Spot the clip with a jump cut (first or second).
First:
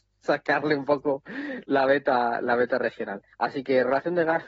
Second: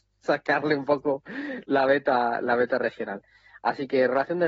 first